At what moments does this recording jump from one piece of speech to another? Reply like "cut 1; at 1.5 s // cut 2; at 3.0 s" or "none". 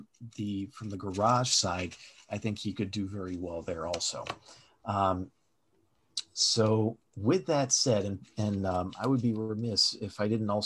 cut 1; at 7.1 s

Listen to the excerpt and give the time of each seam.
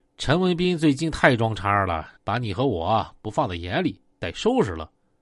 cut 1; at 2.2 s

